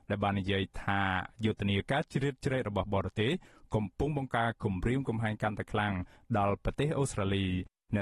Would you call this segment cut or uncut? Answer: cut